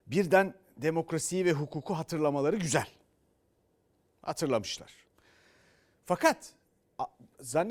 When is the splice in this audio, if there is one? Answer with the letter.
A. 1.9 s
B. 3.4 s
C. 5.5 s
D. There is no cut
D